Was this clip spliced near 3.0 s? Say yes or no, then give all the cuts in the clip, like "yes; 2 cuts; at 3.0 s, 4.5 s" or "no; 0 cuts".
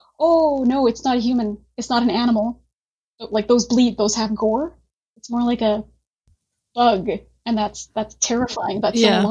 no; 0 cuts